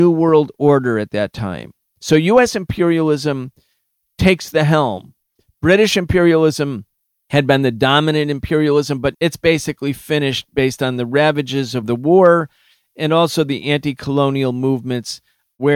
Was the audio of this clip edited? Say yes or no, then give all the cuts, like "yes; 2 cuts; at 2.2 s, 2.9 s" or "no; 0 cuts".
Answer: yes; 1 cut; at 9.1 s